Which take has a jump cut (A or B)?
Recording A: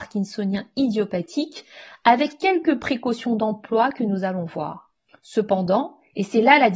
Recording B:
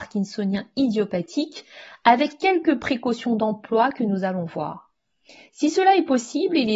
A